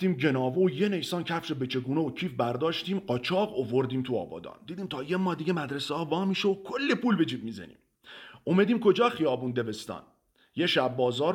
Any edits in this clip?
no; 0 cuts

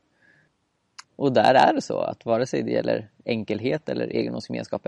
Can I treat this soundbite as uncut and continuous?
no; 1 cut; at 1.0 s

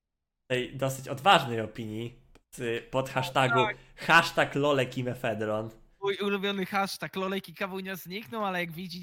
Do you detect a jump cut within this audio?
no; 0 cuts

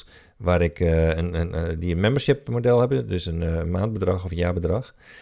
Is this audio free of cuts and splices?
yes; 0 cuts

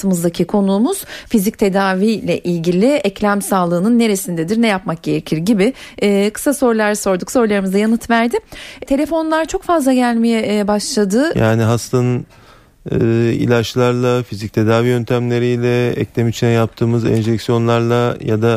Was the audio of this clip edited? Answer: yes; 2 cuts; at 8.9 s, 11.3 s

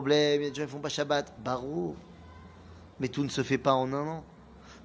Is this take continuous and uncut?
yes; 0 cuts

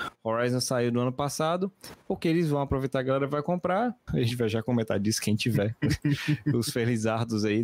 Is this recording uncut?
no; 1 cut; at 4.1 s

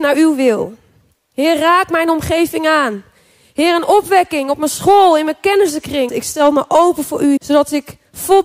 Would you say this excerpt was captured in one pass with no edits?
no; 2 cuts; at 6.1 s, 7.4 s

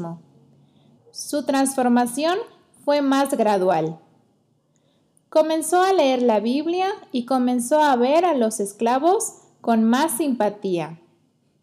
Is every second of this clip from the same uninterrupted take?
no; 1 cut; at 1.0 s

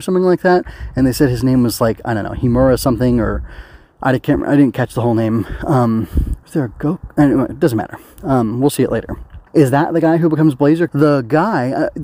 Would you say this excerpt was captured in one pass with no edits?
no; 3 cuts; at 6.4 s, 9.5 s, 10.9 s

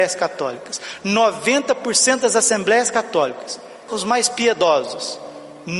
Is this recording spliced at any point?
yes; 1 cut; at 3.9 s

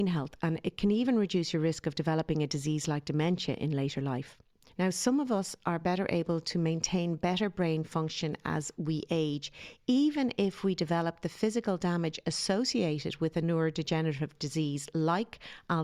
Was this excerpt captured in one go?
yes; 0 cuts

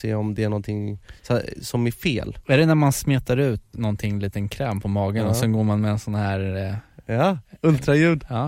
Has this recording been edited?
yes; 1 cut; at 3.7 s

